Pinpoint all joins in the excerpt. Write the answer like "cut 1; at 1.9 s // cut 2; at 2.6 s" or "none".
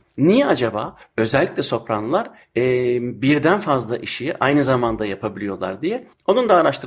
none